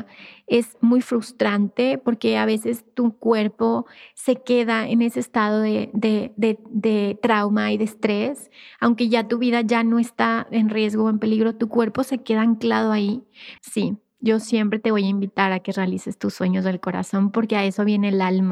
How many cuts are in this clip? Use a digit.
1